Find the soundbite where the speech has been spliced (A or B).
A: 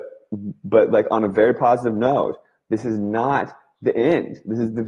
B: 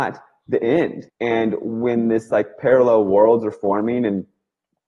B